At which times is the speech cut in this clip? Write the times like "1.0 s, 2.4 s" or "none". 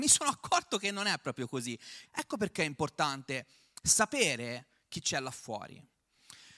2.0 s

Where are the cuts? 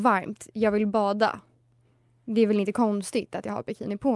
none

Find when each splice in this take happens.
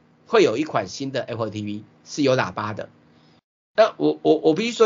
none

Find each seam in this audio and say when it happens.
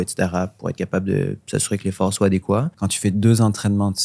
2.7 s

